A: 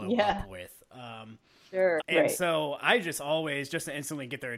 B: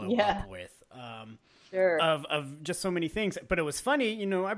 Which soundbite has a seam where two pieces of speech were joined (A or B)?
A